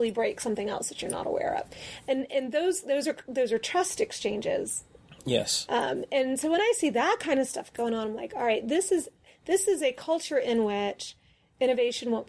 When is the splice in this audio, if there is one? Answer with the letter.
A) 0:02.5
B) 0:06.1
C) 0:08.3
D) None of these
D